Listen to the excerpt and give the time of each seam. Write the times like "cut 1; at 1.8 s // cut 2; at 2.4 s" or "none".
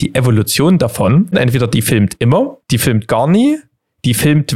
cut 1; at 1.3 s // cut 2; at 2.6 s